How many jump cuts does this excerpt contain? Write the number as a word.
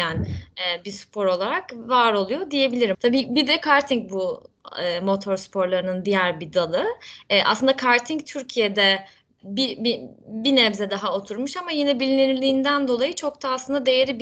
one